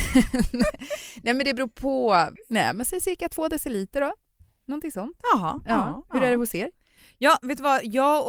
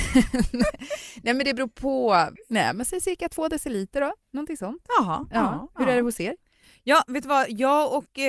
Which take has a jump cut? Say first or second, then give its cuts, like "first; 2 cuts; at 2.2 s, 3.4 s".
second; 1 cut; at 4.2 s